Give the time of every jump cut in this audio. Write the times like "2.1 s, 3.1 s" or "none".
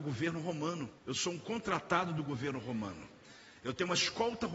1.0 s